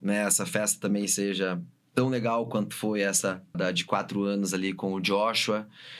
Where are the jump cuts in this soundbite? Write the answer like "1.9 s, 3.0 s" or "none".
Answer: 3.5 s